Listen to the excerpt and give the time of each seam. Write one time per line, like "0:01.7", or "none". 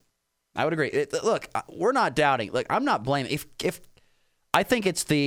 none